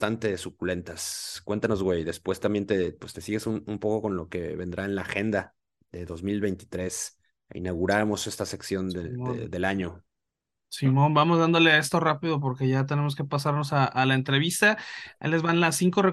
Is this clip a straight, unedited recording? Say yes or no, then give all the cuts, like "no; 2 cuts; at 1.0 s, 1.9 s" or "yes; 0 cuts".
yes; 0 cuts